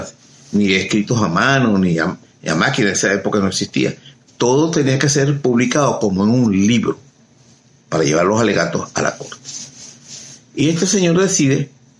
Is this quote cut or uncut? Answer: uncut